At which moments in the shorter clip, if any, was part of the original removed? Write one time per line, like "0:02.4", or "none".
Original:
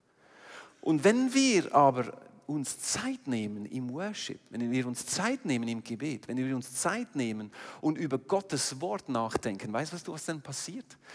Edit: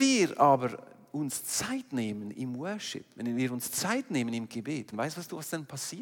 0:04.9